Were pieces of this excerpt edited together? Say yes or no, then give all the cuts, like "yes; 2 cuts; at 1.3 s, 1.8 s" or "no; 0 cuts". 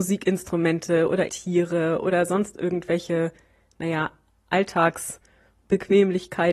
yes; 1 cut; at 1.3 s